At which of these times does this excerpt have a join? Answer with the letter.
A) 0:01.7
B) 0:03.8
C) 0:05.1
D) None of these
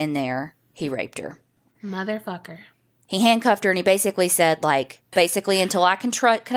C